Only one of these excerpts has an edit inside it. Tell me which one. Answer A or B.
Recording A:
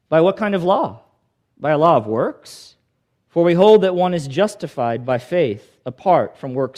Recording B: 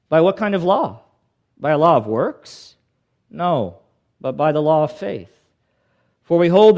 A